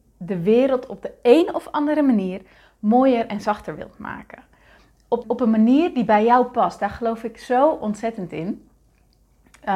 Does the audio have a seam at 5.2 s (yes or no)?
yes